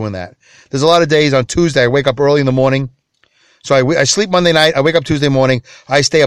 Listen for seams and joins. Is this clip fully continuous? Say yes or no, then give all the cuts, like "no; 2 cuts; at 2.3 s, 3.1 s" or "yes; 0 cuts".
yes; 0 cuts